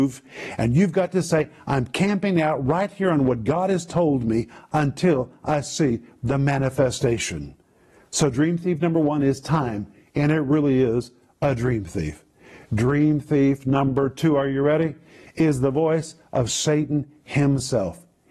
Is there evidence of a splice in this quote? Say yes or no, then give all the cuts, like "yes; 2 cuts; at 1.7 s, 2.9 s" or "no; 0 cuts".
no; 0 cuts